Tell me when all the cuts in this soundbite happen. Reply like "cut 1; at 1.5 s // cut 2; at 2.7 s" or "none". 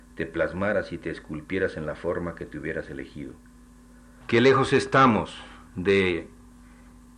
cut 1; at 4.2 s // cut 2; at 5.7 s